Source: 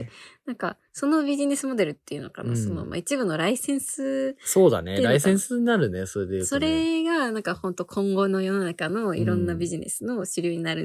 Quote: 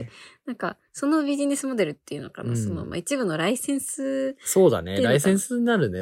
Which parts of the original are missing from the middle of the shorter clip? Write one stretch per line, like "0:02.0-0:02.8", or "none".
none